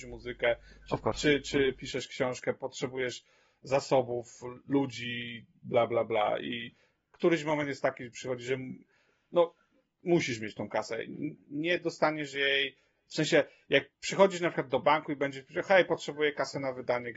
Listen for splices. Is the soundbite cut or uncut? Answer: uncut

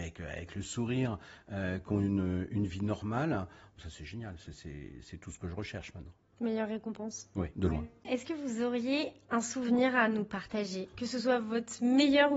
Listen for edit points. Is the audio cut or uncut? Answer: uncut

